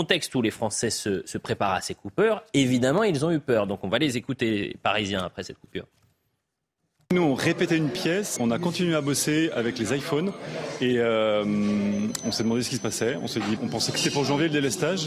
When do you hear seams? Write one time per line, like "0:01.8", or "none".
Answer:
0:08.4
0:13.6